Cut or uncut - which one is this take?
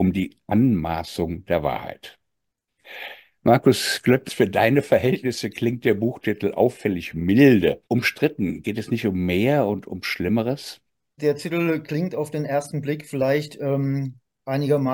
cut